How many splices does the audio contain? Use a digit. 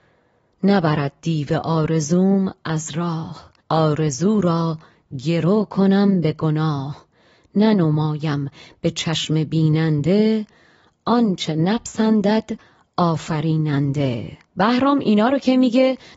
2